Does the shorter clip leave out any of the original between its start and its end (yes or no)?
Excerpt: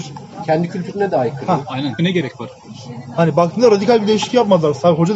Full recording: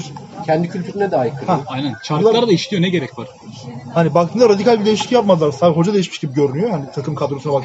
yes